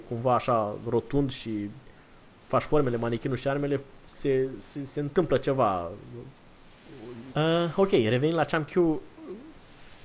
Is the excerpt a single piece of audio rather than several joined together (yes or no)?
no